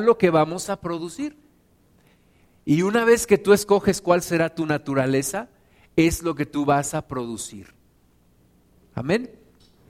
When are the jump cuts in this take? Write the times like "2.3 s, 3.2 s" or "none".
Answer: none